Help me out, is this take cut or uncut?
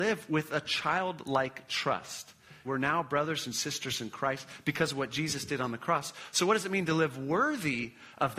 cut